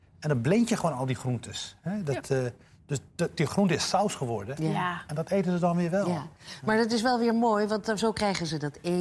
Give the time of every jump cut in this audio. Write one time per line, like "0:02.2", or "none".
none